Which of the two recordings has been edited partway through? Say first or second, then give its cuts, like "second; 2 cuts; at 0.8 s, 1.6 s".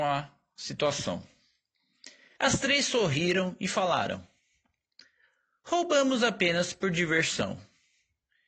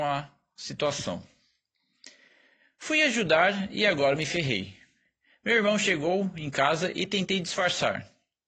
first; 1 cut; at 2.4 s